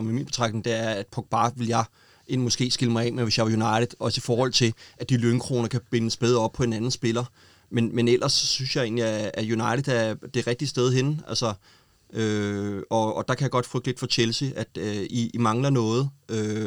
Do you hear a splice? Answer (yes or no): no